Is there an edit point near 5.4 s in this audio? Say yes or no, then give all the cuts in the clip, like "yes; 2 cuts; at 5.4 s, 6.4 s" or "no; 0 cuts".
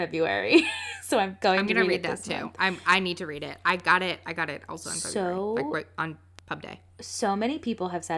no; 0 cuts